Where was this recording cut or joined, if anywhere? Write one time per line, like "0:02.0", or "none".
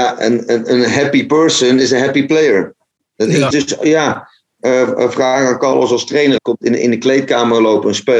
0:03.5
0:06.4

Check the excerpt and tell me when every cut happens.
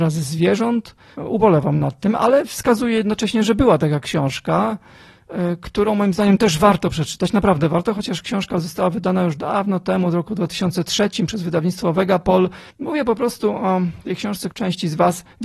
0:01.1
0:12.7
0:14.5

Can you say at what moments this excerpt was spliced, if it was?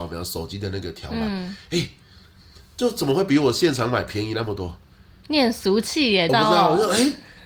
0:06.3

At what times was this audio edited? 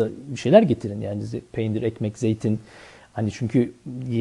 none

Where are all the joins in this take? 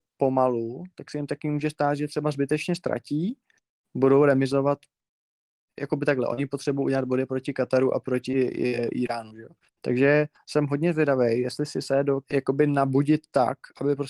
0:09.7
0:12.2

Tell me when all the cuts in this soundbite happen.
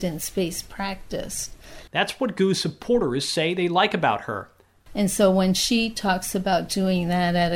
0:01.9
0:04.9

